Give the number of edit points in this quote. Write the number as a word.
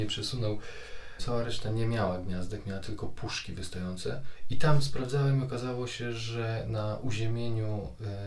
one